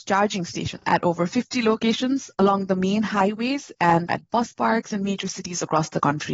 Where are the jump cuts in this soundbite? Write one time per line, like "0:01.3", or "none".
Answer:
0:04.1